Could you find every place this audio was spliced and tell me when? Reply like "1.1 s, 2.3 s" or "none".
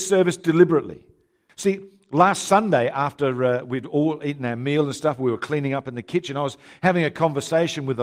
1.5 s